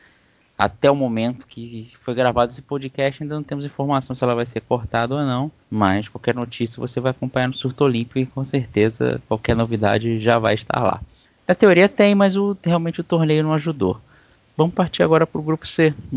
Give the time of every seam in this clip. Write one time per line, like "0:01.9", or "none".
0:05.6
0:11.4